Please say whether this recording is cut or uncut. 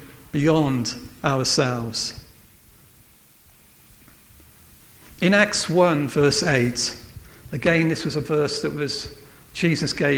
uncut